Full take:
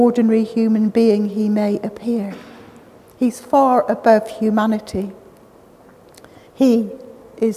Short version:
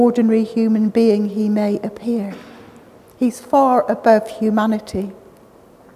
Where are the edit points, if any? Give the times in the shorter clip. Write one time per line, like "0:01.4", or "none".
none